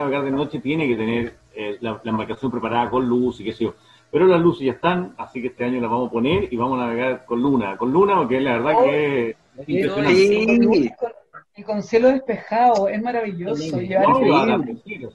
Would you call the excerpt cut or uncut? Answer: uncut